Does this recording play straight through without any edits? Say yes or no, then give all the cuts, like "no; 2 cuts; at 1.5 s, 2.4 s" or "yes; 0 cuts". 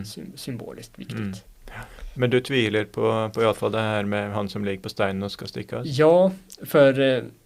yes; 0 cuts